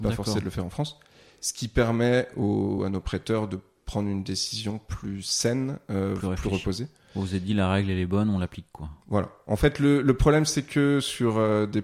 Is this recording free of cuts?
yes; 0 cuts

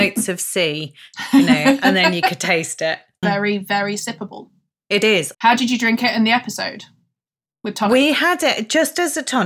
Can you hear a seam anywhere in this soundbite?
yes; 2 cuts; at 3.2 s, 5.3 s

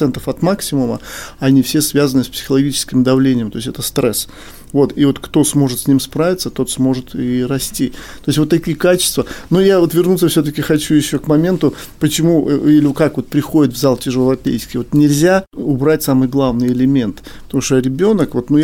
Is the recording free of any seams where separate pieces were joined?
yes; 0 cuts

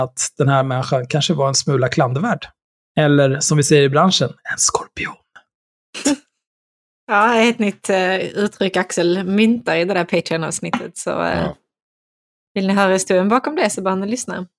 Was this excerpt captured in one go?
yes; 0 cuts

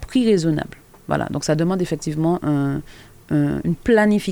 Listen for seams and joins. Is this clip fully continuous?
yes; 0 cuts

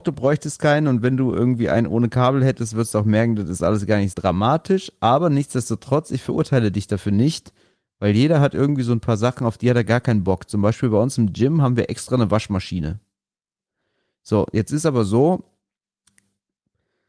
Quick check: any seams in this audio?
yes; 1 cut; at 4.1 s

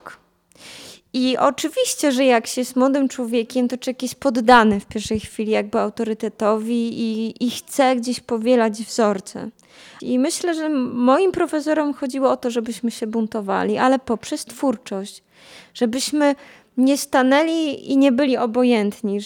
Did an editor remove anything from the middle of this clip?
yes; 2 cuts; at 7.4 s, 10.0 s

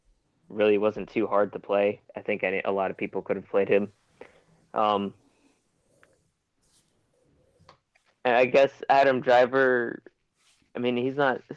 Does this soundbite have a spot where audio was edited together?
no; 0 cuts

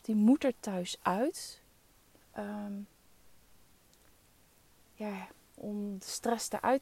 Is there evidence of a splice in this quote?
yes; 2 cuts; at 2.2 s, 5.6 s

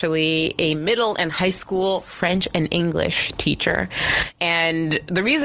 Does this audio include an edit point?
no; 0 cuts

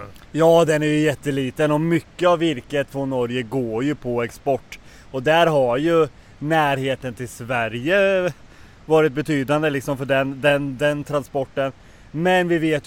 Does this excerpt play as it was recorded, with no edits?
yes; 0 cuts

